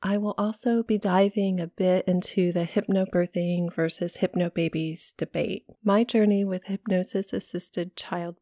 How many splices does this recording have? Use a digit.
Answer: 1